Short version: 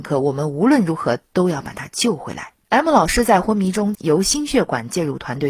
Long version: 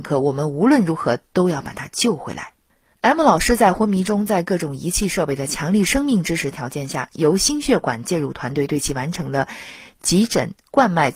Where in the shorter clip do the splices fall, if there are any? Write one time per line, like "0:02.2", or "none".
0:02.6
0:03.9